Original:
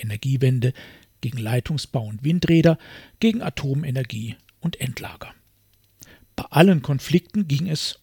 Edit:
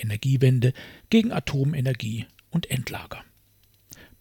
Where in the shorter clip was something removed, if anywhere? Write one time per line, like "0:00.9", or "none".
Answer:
0:01.0